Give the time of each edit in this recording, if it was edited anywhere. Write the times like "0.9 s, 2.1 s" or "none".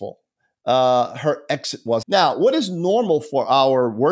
2.0 s